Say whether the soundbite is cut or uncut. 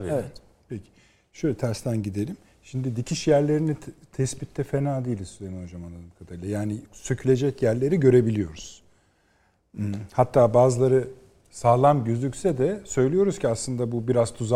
uncut